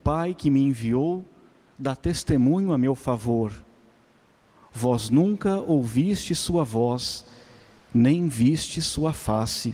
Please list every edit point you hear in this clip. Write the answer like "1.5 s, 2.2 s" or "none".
none